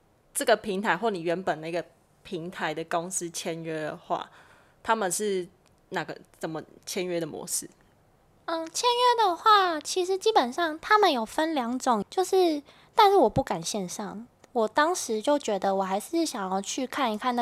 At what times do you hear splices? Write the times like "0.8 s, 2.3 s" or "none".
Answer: 12.0 s